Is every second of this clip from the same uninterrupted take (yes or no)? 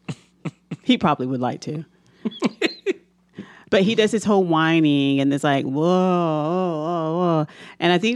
yes